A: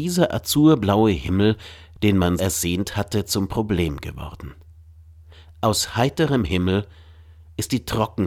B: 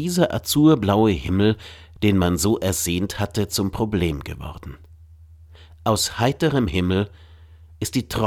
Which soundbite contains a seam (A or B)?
A